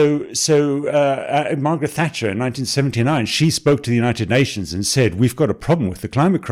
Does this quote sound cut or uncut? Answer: uncut